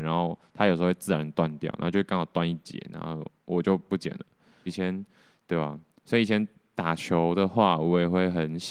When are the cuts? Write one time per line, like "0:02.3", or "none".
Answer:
0:04.7